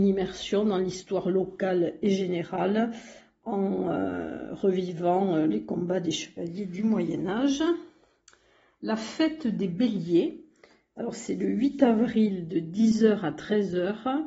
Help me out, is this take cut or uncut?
uncut